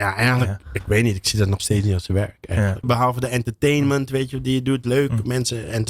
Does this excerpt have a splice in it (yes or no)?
yes